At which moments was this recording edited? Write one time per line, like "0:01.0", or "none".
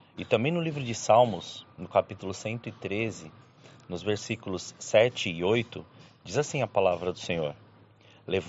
none